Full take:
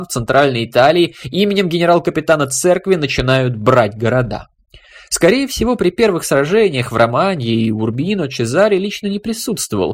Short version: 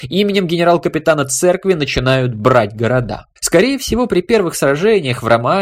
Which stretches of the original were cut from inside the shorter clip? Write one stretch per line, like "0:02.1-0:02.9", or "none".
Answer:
0:04.6-0:05.0